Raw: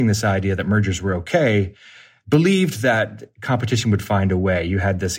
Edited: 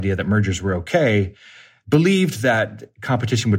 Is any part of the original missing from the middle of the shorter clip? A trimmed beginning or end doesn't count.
no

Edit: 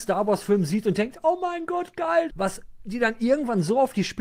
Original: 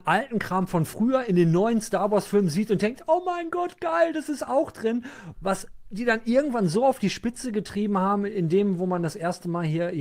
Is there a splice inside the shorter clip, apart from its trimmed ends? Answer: yes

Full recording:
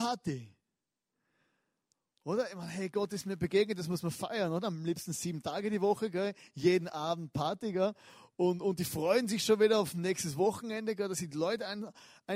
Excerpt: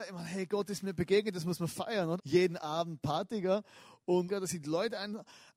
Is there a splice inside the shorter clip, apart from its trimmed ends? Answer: yes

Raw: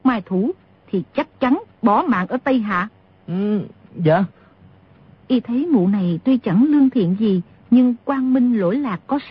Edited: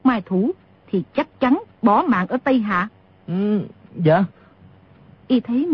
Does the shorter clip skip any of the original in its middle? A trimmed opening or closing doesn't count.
no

